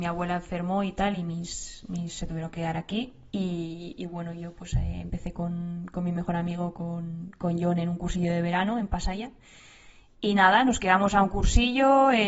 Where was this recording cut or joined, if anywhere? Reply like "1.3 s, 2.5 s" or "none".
none